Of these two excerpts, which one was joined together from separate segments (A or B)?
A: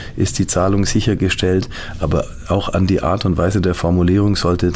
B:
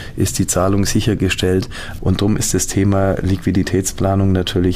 B